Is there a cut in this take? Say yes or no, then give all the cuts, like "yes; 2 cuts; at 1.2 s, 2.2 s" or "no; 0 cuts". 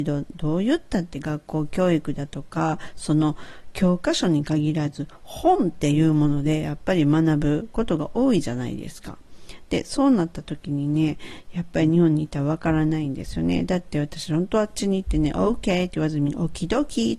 no; 0 cuts